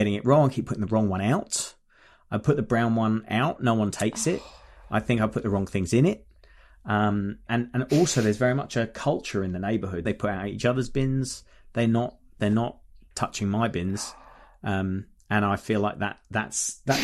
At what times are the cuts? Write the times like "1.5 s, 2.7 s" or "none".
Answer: 7.5 s, 10.1 s

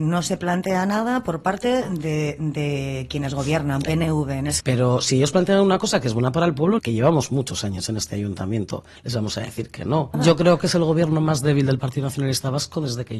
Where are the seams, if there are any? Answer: 4.6 s, 6.8 s, 10.1 s

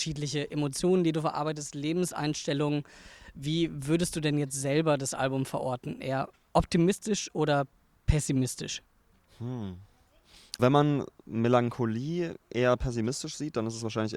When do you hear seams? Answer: 10.6 s

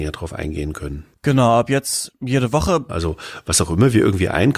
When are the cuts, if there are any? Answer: 2.9 s

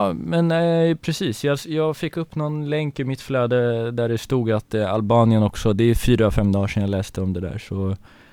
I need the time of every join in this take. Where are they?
none

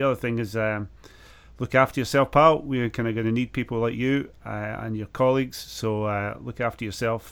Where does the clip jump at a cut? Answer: none

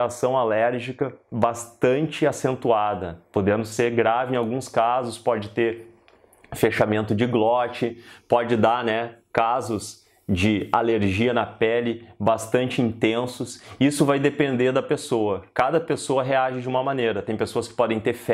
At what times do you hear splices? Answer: none

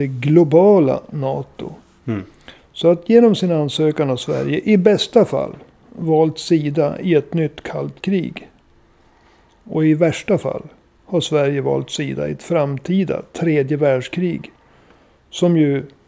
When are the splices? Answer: none

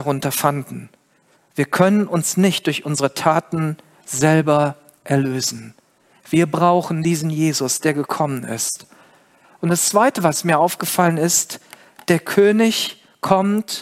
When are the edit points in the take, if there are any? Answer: 1.4 s

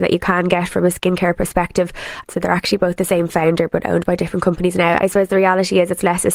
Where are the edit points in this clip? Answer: 2.2 s, 5.0 s

